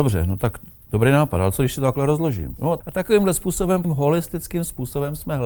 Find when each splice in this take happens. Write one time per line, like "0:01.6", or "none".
0:02.8
0:03.8